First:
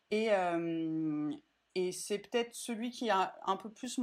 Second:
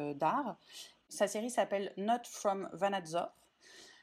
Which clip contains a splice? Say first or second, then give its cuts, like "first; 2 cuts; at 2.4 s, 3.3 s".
second; 1 cut; at 1.0 s